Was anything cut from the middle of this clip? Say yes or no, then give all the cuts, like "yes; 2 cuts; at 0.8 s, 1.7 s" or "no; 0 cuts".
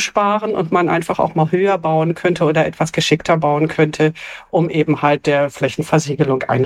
no; 0 cuts